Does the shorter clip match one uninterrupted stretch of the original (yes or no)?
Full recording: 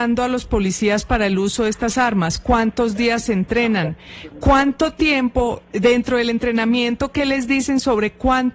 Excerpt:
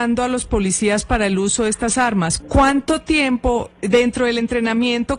no